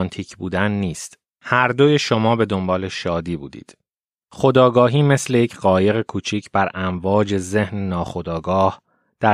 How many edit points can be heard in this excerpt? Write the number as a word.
two